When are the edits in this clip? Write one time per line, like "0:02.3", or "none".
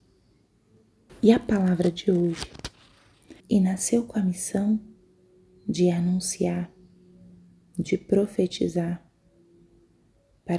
0:01.1
0:03.4